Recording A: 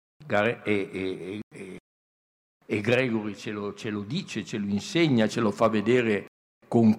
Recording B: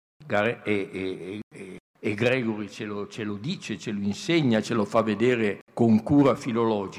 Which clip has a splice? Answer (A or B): B